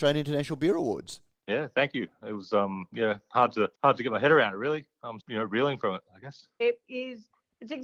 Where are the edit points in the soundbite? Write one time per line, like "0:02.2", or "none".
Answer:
0:03.7
0:05.2
0:06.6